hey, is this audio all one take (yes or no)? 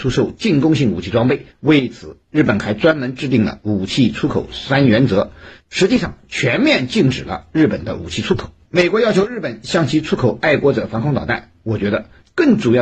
no